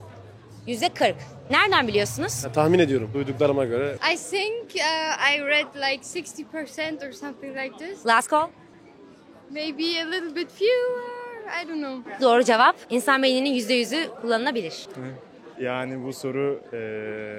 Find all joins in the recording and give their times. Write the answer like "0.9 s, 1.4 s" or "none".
12.2 s, 15.5 s

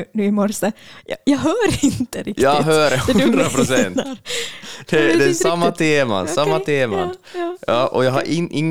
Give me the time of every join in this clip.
none

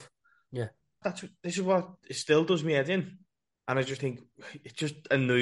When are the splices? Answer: 1.0 s, 3.5 s

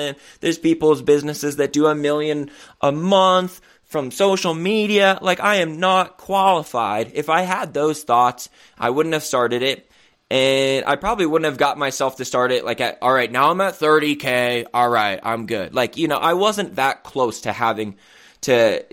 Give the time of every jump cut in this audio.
none

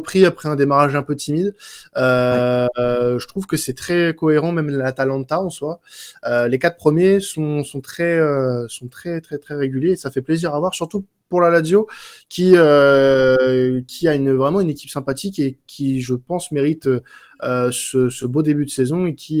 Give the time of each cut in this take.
none

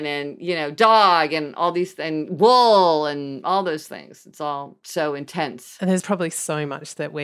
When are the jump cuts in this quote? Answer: none

